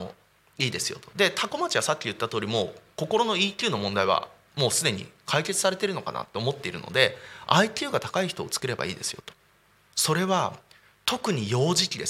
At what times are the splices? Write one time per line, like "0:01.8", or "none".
0:09.9